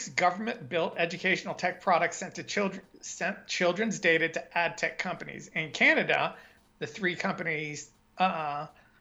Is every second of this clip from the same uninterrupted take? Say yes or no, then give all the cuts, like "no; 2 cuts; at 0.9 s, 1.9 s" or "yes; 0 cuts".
yes; 0 cuts